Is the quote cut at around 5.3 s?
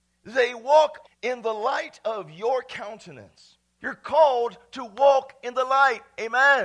no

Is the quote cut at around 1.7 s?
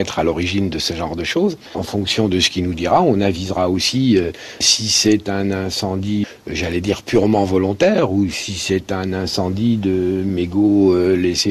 no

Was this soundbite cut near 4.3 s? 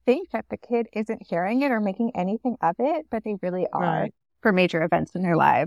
yes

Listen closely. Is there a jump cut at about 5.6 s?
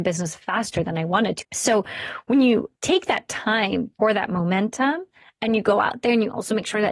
no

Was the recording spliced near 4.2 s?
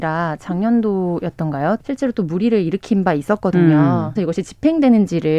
yes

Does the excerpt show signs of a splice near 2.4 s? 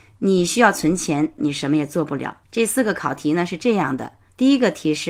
yes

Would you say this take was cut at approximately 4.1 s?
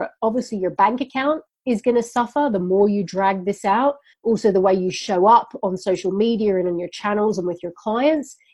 yes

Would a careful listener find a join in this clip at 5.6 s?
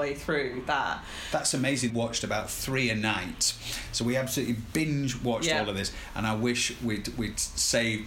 no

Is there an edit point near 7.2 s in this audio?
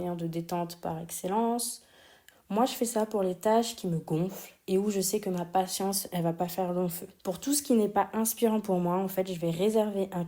yes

